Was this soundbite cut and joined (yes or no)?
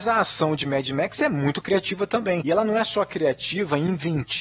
no